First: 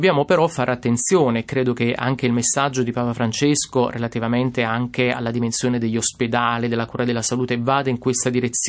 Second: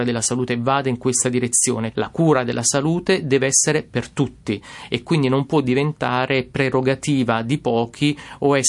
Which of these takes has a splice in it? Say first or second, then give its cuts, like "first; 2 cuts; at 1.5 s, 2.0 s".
second; 1 cut; at 1.9 s